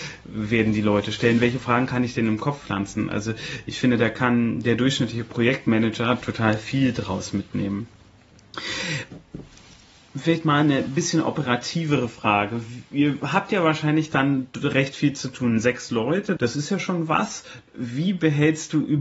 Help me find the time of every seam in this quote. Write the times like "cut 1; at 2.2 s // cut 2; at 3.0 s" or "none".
cut 1; at 16.4 s // cut 2; at 17.7 s

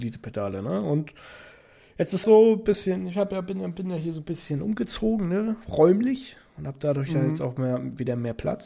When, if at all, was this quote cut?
cut 1; at 2.2 s

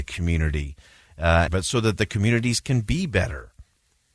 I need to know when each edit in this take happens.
cut 1; at 1.5 s

